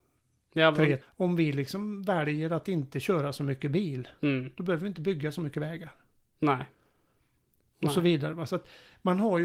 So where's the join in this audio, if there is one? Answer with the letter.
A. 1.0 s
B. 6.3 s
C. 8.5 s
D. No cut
A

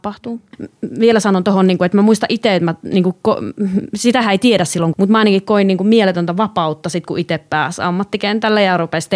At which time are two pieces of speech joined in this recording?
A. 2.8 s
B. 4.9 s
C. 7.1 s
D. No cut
B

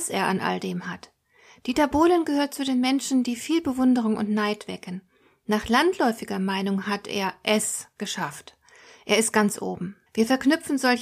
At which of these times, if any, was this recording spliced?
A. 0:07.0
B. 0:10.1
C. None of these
B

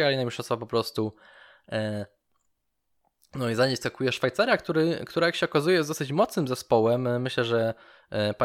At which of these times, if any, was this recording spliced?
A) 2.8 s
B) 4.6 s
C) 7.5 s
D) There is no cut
D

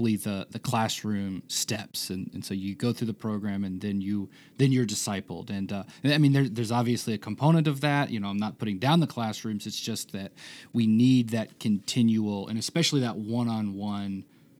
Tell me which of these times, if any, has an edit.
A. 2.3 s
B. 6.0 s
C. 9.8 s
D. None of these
D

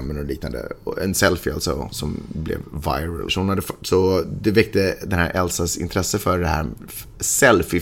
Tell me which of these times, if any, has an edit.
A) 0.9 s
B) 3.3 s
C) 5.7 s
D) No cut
B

